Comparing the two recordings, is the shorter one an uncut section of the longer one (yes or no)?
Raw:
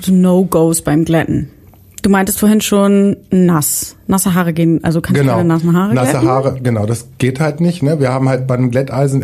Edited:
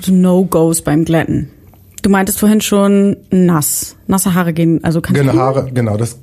no